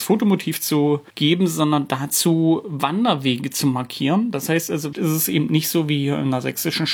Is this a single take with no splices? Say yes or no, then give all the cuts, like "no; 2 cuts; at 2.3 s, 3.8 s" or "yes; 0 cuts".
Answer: no; 2 cuts; at 1.1 s, 4.9 s